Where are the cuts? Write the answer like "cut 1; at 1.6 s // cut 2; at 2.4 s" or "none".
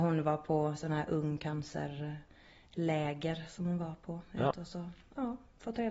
cut 1; at 4.5 s